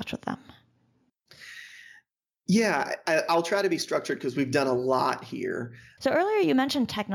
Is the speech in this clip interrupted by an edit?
yes; 1 cut; at 6.0 s

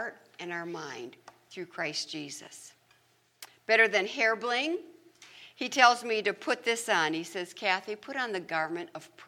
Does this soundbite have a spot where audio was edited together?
no; 0 cuts

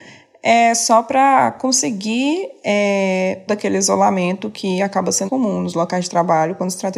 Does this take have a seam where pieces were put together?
yes; 2 cuts; at 3.5 s, 5.3 s

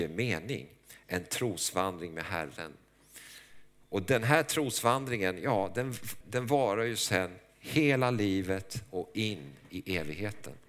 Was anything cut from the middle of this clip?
yes; 1 cut; at 6.2 s

